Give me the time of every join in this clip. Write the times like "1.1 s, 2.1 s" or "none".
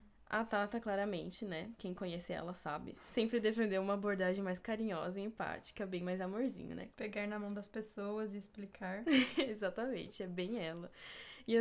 6.9 s